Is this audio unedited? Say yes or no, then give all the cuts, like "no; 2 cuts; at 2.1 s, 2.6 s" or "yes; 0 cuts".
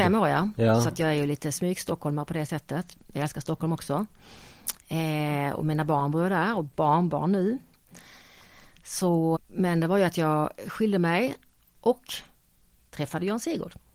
no; 1 cut; at 9.4 s